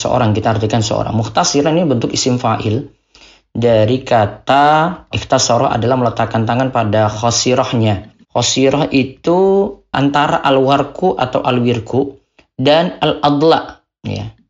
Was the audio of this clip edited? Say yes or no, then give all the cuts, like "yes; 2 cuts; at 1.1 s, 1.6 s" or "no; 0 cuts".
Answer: yes; 2 cuts; at 5.1 s, 8.2 s